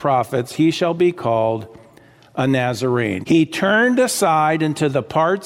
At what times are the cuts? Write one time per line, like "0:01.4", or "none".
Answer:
0:03.2